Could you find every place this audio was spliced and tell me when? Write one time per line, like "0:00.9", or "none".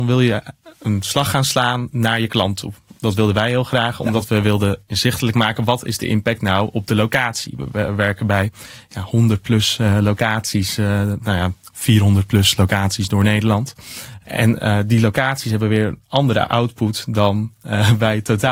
none